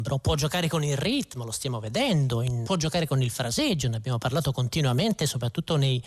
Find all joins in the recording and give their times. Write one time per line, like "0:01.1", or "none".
0:02.6